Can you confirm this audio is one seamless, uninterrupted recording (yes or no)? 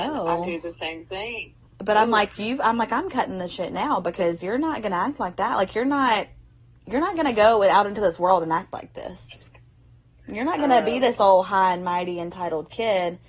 yes